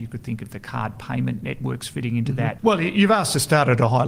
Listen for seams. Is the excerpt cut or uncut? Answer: cut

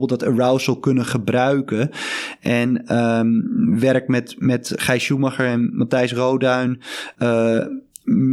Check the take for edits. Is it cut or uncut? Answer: uncut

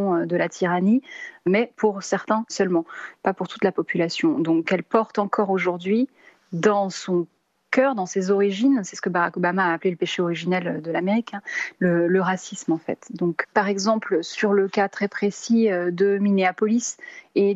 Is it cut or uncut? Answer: cut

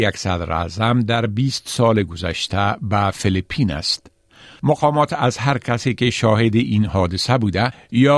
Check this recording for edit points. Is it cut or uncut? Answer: cut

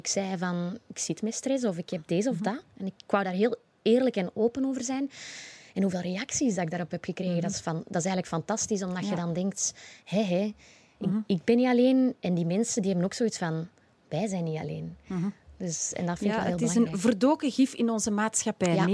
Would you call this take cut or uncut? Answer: uncut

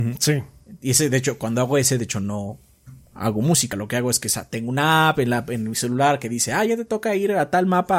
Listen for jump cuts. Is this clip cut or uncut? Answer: uncut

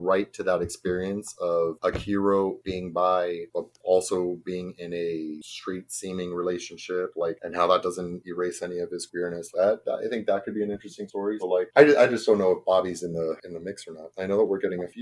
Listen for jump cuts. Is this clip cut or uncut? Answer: cut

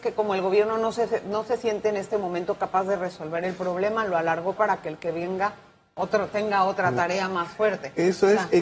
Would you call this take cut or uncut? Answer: uncut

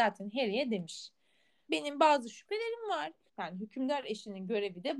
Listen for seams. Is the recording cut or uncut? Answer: cut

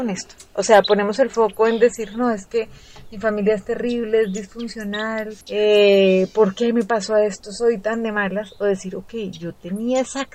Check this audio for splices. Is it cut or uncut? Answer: cut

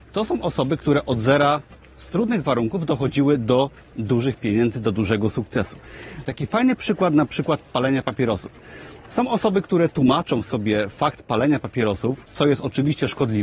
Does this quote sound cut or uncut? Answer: cut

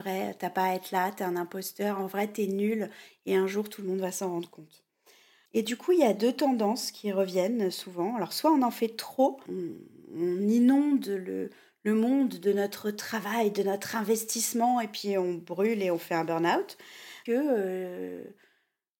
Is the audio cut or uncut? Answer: cut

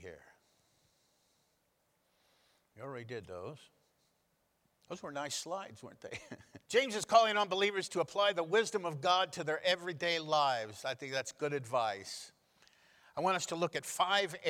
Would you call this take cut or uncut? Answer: cut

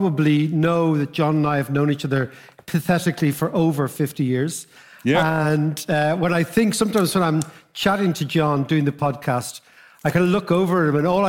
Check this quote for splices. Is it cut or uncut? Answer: uncut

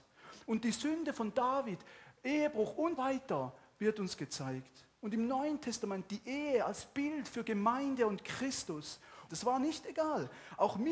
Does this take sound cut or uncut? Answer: cut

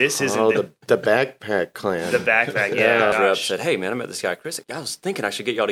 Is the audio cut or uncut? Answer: cut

